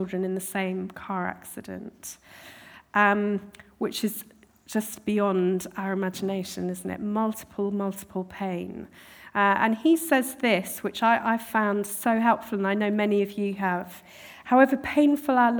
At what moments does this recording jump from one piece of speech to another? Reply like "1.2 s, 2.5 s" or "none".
none

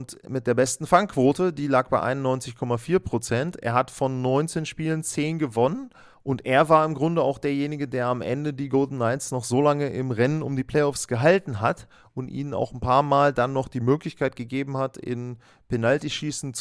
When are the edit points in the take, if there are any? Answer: none

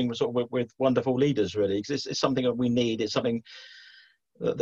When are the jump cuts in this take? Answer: none

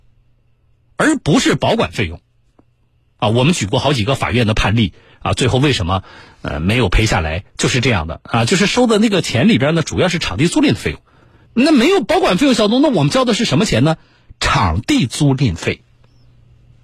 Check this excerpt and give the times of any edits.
11.5 s

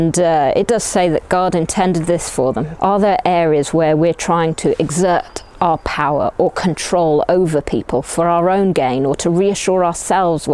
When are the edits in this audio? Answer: 2.8 s

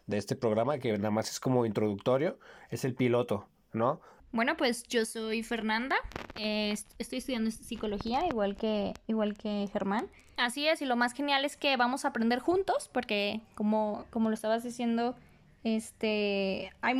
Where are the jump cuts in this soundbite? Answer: 4.2 s, 10.4 s

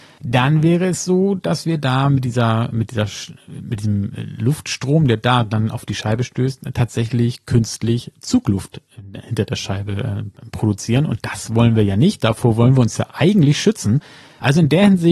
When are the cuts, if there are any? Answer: none

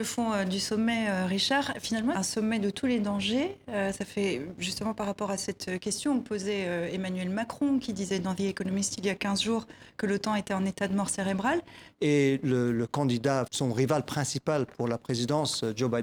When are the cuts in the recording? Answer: 2.1 s, 11.9 s, 13.5 s

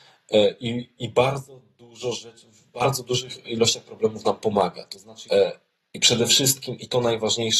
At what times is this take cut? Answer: 5.3 s

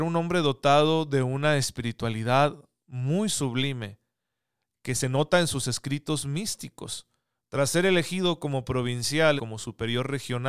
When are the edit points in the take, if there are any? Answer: 7.4 s, 9.4 s

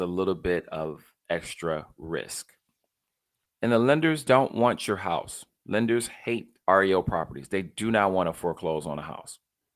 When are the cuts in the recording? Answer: 3.4 s, 6.6 s

